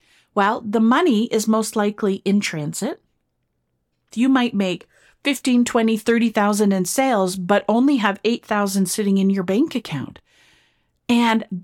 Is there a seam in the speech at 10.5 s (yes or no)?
no